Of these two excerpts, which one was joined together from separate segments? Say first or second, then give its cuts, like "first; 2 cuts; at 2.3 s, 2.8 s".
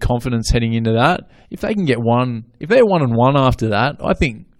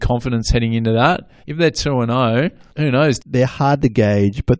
second; 2 cuts; at 1.4 s, 3.2 s